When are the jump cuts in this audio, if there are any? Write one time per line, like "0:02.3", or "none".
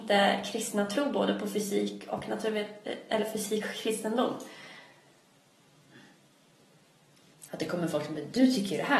0:07.5